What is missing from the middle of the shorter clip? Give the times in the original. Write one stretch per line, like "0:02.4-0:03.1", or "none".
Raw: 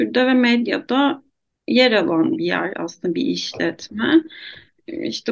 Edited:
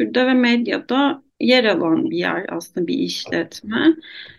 0:01.3-0:01.6